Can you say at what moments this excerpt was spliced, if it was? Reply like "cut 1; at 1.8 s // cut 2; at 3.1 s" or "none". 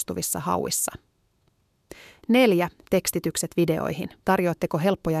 cut 1; at 4.2 s